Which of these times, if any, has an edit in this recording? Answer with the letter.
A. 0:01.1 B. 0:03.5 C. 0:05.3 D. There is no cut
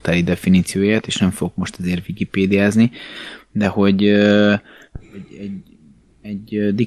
D